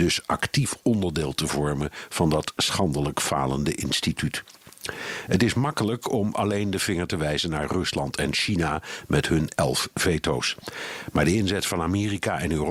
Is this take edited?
no; 0 cuts

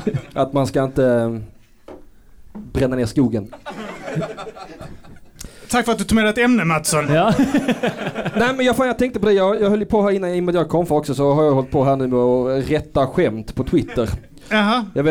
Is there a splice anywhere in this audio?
no; 0 cuts

